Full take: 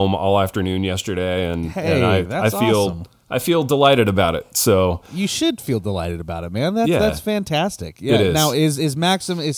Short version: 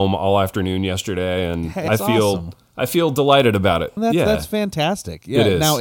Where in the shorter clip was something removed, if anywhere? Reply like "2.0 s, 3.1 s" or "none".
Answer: 1.9 s, 4.0 s